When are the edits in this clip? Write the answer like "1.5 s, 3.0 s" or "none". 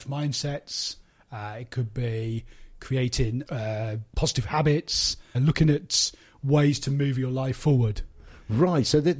3.5 s, 5.3 s